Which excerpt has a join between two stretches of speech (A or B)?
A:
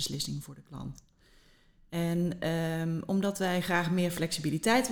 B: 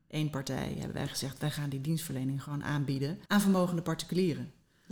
B